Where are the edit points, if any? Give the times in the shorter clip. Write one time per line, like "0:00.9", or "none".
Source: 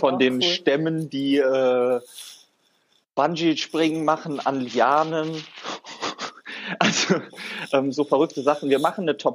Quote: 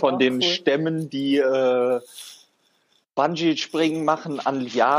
none